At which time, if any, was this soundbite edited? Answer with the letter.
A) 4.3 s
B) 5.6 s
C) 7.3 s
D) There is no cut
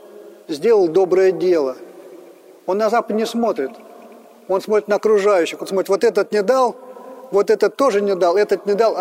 D